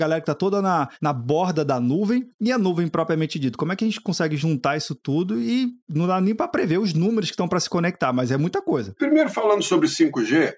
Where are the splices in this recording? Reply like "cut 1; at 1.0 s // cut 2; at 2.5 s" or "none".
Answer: none